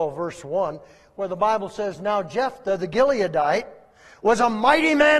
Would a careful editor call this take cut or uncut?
uncut